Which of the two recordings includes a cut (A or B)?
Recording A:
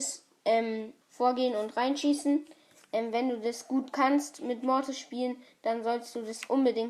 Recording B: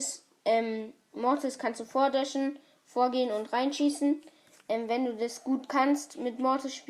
A